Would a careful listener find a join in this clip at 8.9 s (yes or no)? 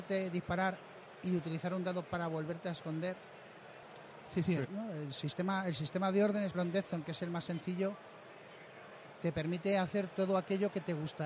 no